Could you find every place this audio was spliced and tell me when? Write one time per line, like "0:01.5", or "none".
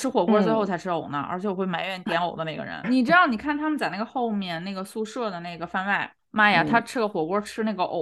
0:02.8